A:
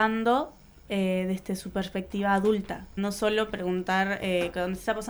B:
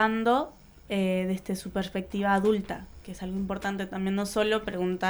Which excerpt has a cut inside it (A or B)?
A